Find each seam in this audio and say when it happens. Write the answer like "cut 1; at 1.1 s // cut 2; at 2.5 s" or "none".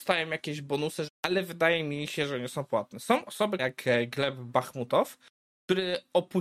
cut 1; at 1.1 s // cut 2; at 3.6 s